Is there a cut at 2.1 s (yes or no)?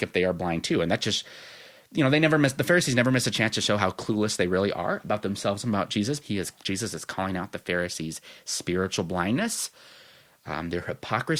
no